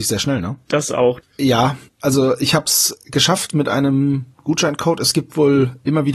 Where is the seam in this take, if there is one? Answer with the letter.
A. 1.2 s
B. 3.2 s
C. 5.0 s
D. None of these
A